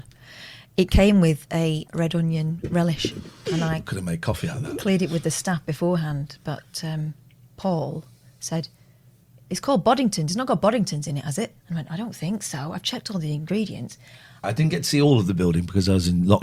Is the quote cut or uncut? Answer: cut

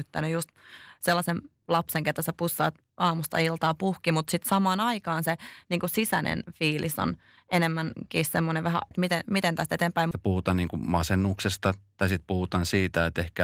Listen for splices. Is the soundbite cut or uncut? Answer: cut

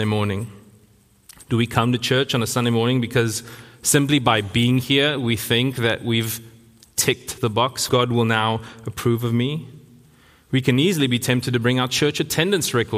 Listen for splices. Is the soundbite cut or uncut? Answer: cut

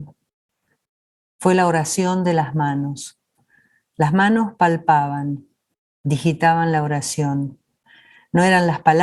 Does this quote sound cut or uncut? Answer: uncut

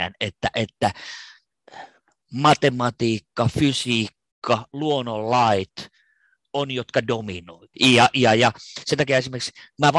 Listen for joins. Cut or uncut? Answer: cut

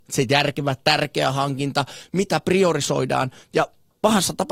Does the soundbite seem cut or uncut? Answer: uncut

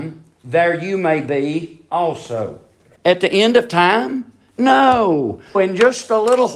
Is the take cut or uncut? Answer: cut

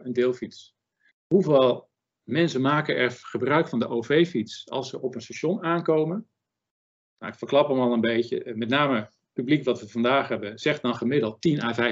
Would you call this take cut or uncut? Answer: cut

